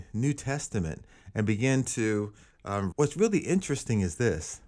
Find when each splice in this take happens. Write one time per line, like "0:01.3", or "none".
0:02.9